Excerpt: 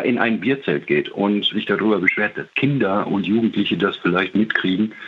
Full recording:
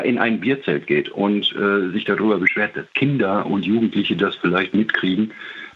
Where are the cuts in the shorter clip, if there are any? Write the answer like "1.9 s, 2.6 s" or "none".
1.5 s